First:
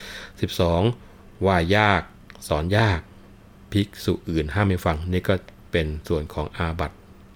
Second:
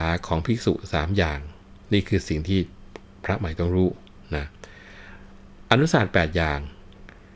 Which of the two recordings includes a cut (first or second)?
second